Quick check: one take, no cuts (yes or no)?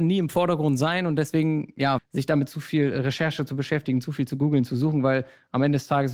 no